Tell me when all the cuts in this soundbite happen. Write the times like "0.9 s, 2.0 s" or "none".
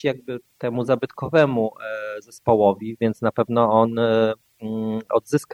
3.0 s

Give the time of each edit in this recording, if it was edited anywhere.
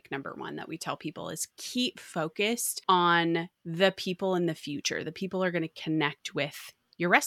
none

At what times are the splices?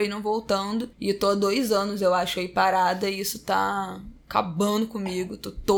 0.9 s

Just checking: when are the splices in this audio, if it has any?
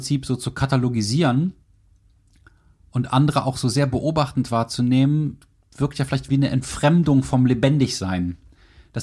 6.3 s

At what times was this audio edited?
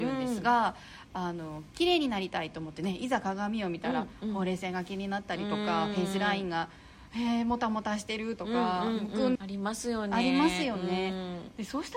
9.4 s

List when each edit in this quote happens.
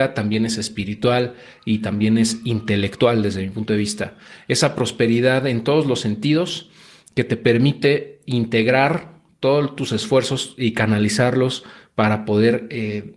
none

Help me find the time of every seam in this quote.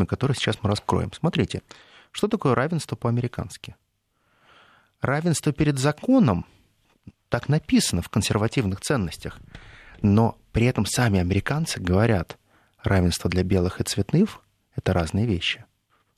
none

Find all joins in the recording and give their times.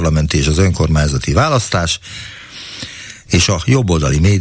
3.3 s

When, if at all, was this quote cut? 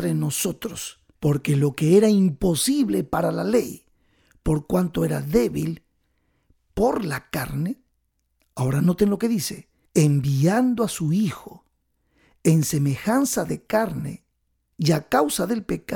1.2 s, 9.9 s, 14.7 s

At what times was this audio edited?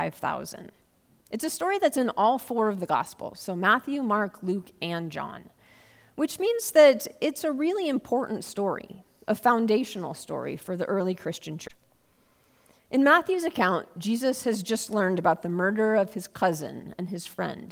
none

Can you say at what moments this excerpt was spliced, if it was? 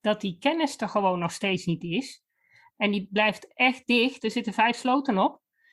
2.7 s

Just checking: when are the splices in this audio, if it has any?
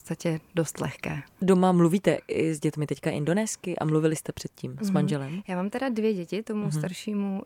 none

